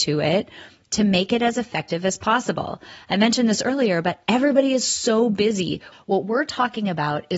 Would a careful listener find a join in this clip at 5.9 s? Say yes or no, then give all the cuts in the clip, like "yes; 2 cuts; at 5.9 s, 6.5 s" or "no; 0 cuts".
yes; 1 cut; at 5.9 s